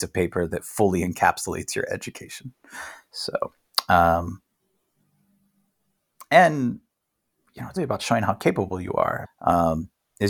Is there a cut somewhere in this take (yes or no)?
yes